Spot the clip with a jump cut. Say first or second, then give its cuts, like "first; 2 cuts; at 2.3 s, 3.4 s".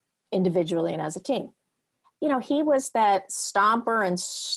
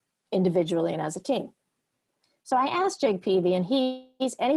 first; 1 cut; at 2.0 s